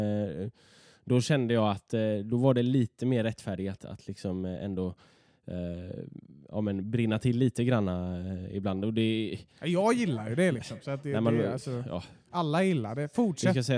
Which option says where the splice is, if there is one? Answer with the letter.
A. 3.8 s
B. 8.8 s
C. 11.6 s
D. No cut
A